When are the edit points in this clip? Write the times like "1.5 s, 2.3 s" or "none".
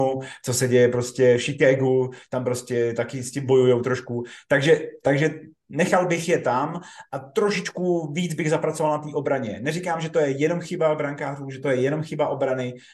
none